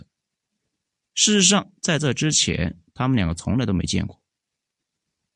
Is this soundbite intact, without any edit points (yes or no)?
yes